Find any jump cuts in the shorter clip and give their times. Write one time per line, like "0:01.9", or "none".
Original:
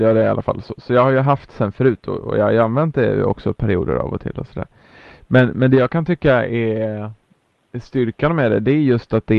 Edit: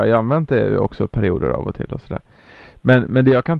none